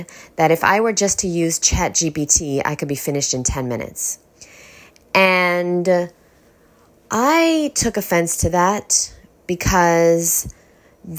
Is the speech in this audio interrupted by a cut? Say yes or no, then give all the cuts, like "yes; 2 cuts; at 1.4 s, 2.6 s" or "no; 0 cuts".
no; 0 cuts